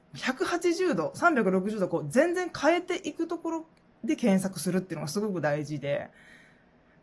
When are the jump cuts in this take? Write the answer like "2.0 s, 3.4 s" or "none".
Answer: none